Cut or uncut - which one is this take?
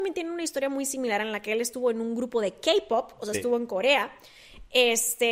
uncut